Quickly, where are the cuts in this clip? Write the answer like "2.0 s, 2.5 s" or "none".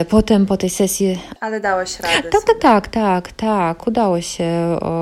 none